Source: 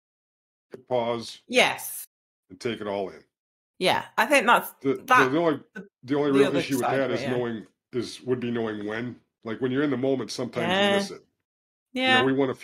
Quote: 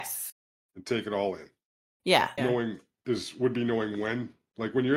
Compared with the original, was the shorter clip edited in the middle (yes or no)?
yes